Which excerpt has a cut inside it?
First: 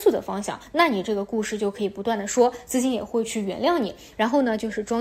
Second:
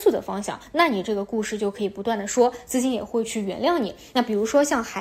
first; 1 cut; at 4.1 s

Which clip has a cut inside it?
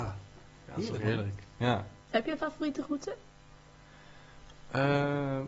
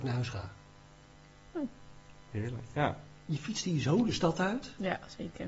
first; 1 cut; at 2.0 s

